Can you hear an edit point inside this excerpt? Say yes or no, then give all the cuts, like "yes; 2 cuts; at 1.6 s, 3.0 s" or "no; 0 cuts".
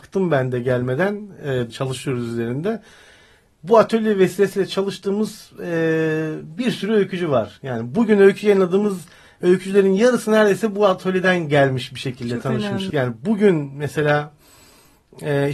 yes; 2 cuts; at 1.7 s, 12.9 s